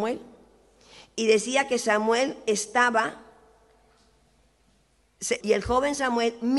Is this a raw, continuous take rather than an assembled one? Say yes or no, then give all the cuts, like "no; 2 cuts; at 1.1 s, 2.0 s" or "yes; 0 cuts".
no; 1 cut; at 5.4 s